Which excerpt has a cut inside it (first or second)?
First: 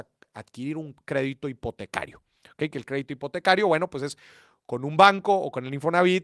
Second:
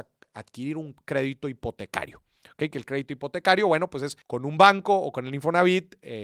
second